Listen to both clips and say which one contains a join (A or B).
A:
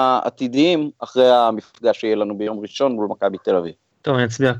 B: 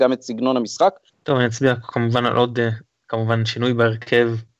B